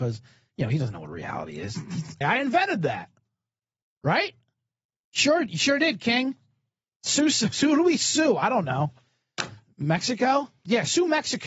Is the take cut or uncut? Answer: cut